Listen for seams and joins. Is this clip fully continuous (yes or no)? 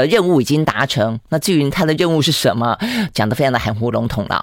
yes